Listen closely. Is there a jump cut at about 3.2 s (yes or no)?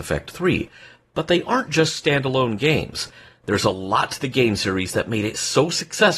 yes